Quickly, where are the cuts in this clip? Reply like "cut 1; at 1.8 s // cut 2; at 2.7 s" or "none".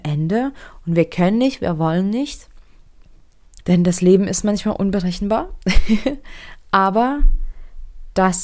cut 1; at 3.6 s